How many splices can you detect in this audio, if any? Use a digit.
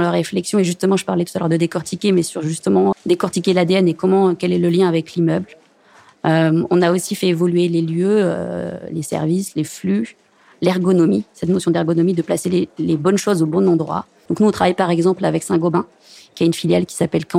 2